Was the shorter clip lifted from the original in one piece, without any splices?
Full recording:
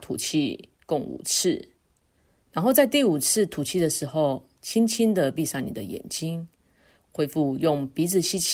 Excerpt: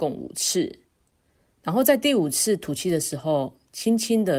yes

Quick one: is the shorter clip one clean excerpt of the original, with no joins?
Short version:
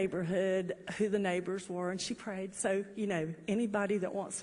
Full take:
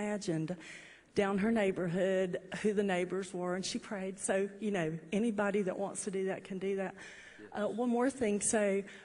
yes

